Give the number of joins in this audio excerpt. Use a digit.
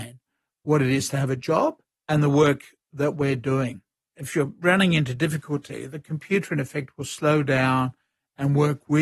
1